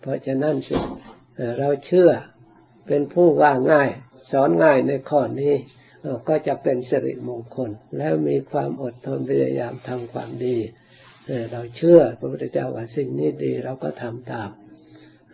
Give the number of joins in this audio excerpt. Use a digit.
1